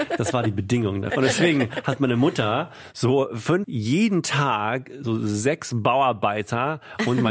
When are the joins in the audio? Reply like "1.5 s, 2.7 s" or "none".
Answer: 1.1 s, 3.6 s